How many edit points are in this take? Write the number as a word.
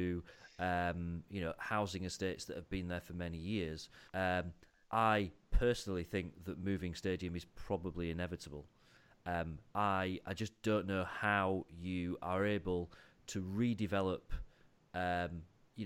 one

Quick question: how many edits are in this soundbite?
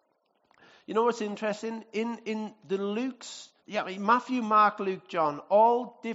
one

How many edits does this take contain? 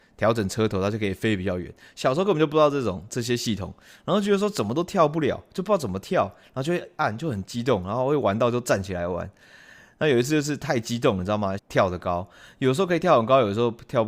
one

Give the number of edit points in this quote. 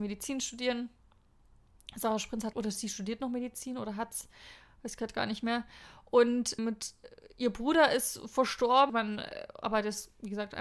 three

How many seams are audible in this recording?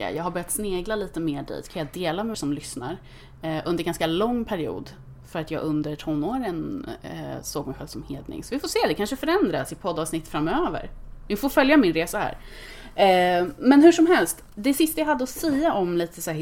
one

